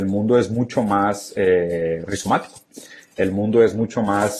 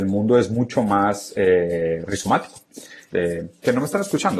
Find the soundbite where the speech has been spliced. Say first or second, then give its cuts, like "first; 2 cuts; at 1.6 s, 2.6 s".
second; 1 cut; at 3.1 s